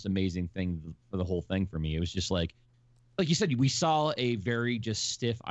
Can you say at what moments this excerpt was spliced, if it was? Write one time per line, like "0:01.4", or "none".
none